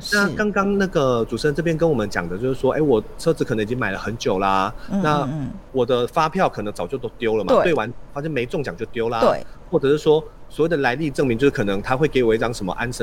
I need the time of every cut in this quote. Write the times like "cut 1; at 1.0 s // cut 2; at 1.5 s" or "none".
cut 1; at 5.7 s